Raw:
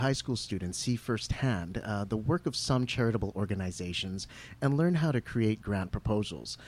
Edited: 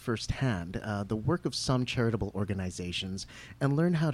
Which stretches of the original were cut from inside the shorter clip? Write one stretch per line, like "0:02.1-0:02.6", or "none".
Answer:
none